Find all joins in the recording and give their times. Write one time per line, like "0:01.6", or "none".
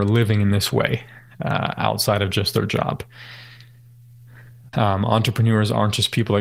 0:04.7